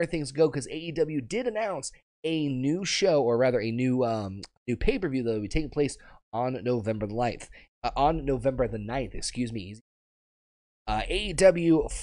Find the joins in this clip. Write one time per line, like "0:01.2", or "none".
none